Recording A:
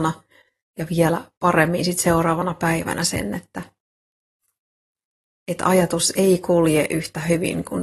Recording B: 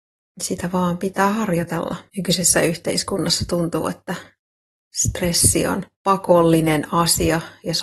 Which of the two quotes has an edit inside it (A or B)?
B